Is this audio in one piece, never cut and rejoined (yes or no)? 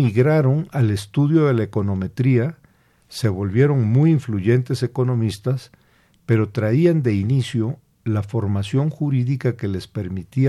yes